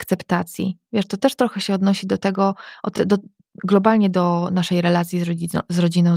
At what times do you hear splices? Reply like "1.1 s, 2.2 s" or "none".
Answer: none